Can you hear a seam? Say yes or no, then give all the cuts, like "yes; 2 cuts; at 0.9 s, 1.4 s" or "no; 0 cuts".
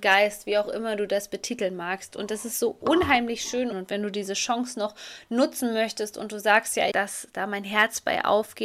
yes; 2 cuts; at 3.7 s, 6.9 s